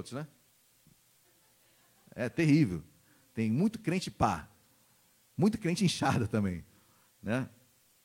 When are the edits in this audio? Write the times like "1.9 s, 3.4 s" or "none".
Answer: none